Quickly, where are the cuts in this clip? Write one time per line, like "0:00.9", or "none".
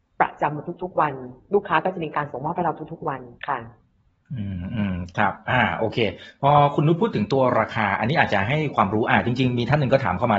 0:03.4

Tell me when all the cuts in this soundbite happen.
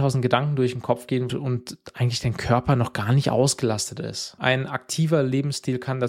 0:01.3
0:04.4

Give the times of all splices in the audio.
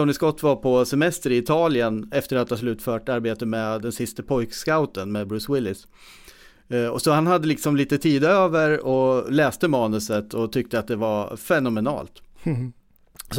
0:02.1

